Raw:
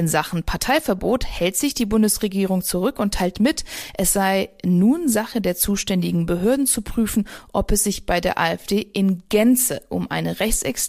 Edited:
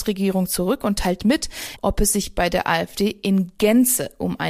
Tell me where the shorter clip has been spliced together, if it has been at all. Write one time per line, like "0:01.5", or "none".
0:01.8